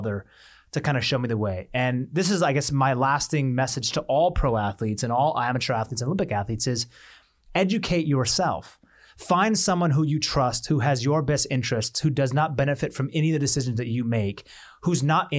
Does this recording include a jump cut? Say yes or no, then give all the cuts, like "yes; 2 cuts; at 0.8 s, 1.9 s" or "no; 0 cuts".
no; 0 cuts